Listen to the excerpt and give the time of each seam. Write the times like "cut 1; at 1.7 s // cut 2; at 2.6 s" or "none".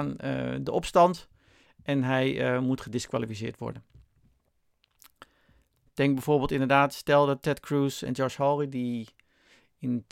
cut 1; at 5.9 s

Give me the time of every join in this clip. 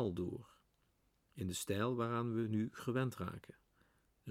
none

